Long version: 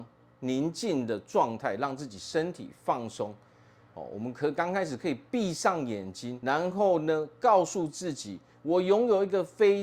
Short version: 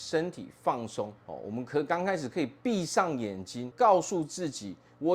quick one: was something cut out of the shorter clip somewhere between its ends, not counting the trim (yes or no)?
yes